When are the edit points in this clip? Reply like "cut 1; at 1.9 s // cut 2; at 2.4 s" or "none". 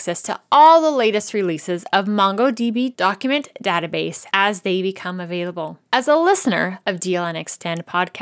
none